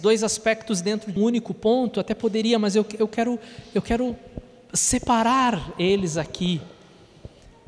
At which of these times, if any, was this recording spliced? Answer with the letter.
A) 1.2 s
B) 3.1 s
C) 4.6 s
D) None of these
A